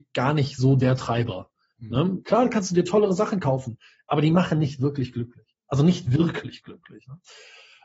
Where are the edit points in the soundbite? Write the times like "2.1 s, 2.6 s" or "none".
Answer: 2.2 s